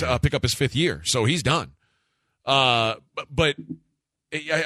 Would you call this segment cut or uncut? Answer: uncut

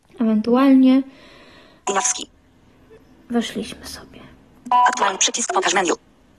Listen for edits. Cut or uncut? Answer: cut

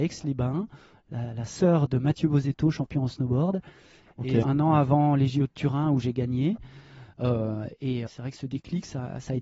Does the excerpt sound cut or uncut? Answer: cut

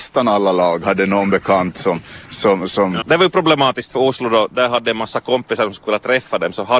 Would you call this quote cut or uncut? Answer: cut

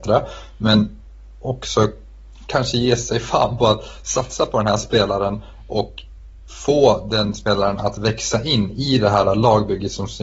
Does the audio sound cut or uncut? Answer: uncut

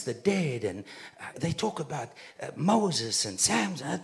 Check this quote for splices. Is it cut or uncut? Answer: cut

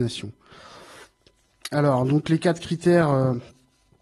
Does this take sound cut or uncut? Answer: uncut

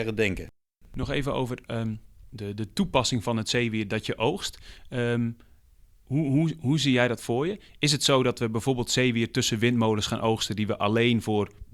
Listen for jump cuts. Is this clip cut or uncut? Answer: uncut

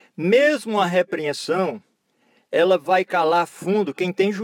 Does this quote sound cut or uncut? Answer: uncut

